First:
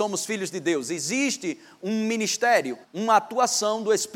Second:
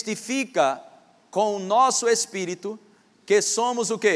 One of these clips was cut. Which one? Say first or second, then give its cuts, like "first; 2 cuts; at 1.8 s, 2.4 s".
first; 1 cut; at 2.8 s